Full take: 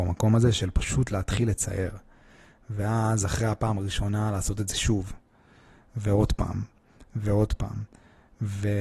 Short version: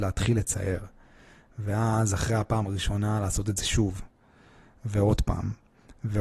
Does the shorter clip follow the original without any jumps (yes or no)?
yes